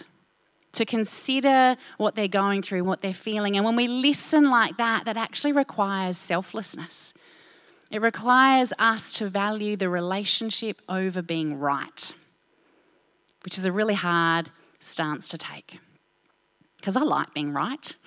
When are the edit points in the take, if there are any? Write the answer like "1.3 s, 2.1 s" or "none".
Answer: 2.8 s